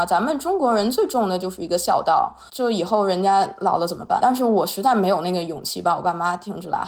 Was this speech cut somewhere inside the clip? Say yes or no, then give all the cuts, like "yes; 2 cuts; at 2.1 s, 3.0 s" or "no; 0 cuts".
yes; 2 cuts; at 2.5 s, 4.2 s